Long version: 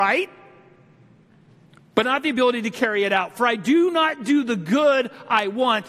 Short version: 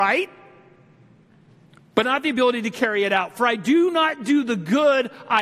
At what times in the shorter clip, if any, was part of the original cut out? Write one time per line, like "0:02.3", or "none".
none